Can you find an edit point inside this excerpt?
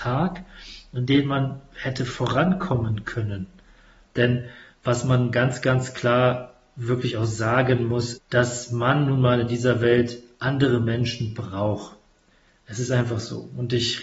yes; 2 cuts; at 4.0 s, 8.1 s

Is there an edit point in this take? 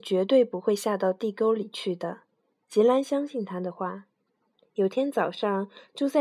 yes; 1 cut; at 4.6 s

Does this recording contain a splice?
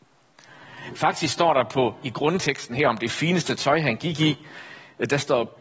yes; 1 cut; at 0.9 s

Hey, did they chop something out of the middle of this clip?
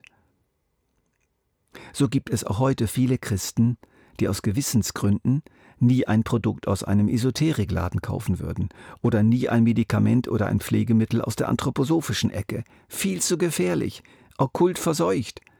no; 0 cuts

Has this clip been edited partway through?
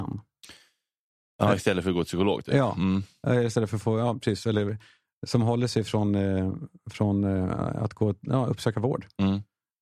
no; 0 cuts

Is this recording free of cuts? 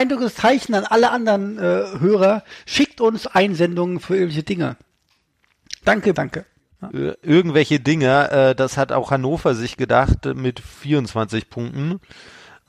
no; 1 cut; at 6.1 s

